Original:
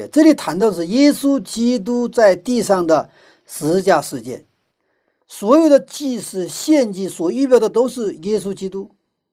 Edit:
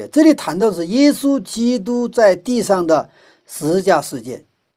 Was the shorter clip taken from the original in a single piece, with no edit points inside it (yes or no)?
yes